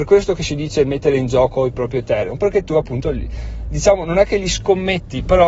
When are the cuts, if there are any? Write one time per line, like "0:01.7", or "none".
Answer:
none